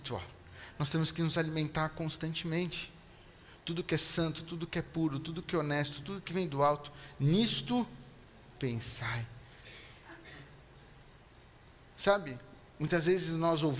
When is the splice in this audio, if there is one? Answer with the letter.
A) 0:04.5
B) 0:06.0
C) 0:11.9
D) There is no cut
B